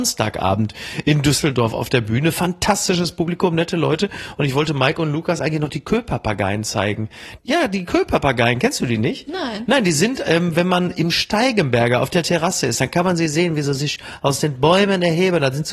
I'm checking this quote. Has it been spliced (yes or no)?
no